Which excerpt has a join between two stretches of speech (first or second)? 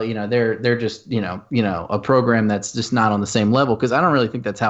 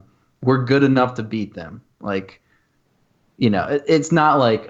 first